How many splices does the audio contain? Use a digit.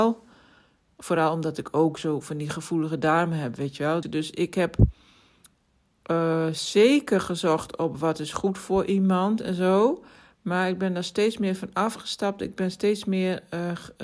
1